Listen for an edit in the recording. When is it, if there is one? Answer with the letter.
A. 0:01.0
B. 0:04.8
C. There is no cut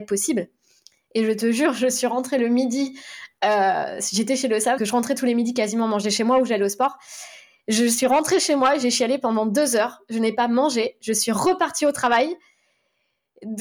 B